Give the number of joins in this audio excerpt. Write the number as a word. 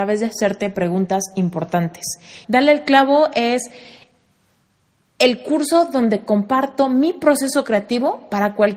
one